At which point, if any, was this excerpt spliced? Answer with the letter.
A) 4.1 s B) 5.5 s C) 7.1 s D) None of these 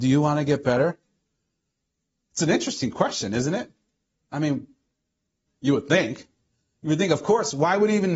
B